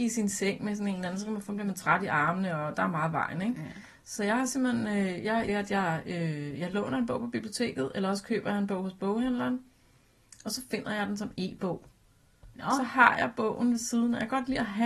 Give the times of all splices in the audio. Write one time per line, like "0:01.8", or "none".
0:05.5